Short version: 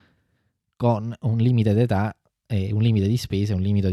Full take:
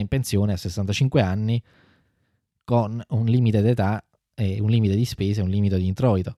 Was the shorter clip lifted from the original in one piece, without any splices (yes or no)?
yes